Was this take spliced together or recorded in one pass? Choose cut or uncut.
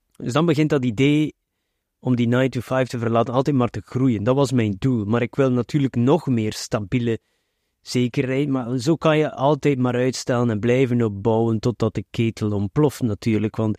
uncut